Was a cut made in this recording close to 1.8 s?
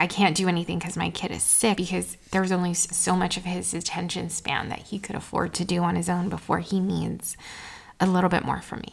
yes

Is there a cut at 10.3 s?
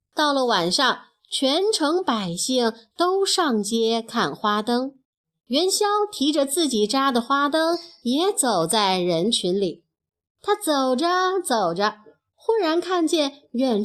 yes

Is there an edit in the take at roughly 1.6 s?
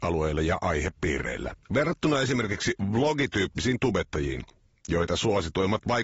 yes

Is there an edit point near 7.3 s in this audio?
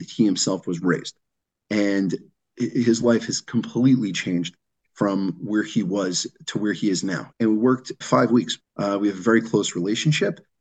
yes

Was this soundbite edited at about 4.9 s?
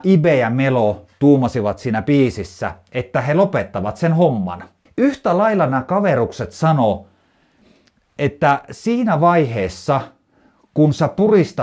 yes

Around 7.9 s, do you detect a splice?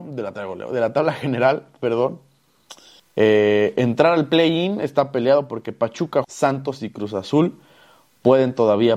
no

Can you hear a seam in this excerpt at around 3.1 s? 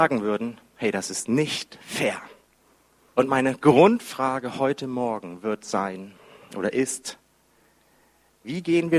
yes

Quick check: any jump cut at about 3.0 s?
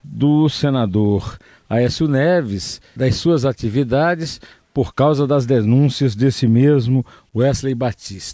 yes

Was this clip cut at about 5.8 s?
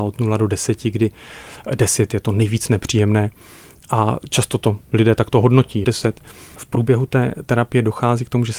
yes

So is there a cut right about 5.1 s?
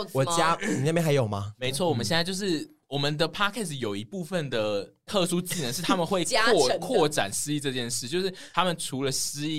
yes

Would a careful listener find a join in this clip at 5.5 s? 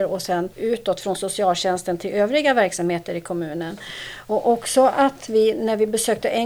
no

